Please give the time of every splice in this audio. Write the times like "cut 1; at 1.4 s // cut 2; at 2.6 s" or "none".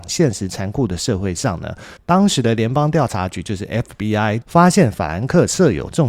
cut 1; at 2.0 s // cut 2; at 4.4 s